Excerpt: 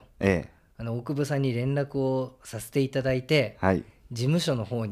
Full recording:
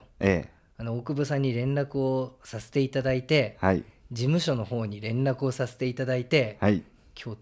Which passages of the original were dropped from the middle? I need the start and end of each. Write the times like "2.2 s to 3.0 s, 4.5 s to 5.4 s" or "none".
none